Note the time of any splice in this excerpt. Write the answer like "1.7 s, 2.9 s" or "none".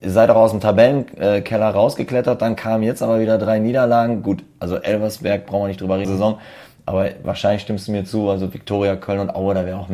6.0 s